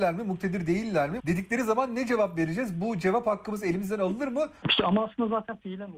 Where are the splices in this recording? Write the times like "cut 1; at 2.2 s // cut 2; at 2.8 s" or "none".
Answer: cut 1; at 1.2 s // cut 2; at 4.6 s